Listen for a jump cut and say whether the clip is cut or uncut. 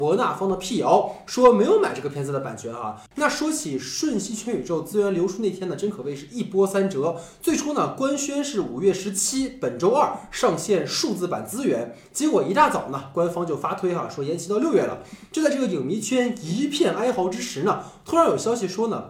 cut